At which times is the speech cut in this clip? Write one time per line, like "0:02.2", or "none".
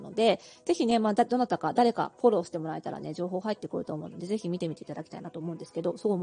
none